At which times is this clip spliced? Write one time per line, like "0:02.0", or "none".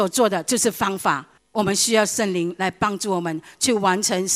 0:01.4